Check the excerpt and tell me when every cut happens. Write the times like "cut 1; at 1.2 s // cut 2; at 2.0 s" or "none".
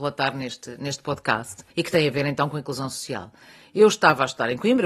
cut 1; at 1.7 s